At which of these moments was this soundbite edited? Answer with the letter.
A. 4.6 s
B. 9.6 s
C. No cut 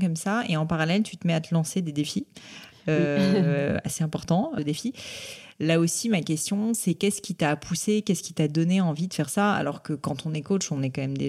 A